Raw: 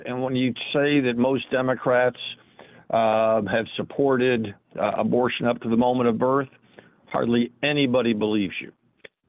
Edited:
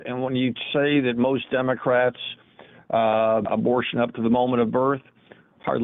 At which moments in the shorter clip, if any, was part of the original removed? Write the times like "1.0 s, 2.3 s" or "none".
3.4 s